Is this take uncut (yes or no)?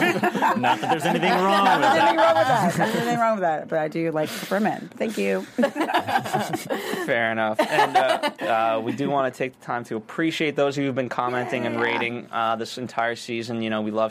no